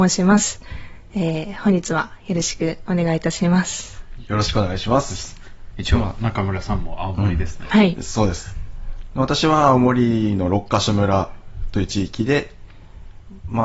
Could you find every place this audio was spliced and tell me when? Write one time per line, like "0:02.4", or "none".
none